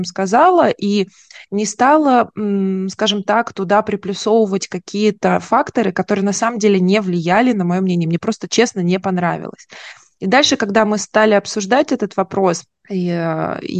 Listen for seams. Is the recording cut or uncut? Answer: uncut